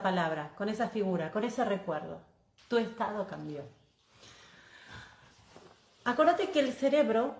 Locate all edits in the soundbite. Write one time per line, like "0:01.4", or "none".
0:02.6